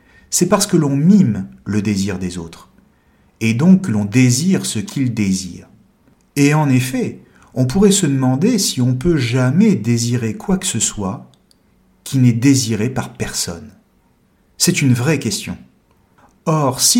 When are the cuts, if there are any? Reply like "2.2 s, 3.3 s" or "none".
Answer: none